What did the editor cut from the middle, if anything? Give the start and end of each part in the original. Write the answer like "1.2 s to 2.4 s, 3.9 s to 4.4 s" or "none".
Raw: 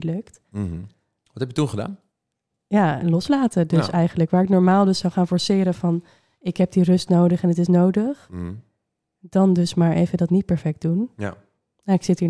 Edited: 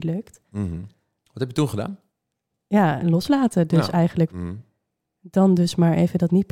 4.3 s to 8.3 s